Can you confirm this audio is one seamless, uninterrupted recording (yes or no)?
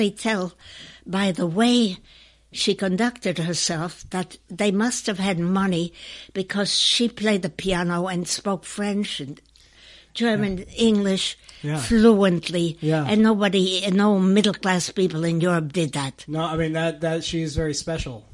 yes